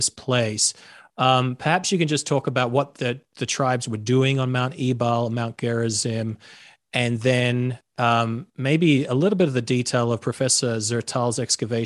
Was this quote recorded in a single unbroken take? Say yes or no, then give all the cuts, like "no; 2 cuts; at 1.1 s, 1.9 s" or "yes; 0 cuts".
yes; 0 cuts